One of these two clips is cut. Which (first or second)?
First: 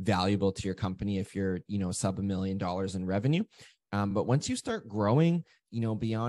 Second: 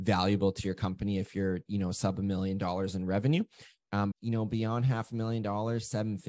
second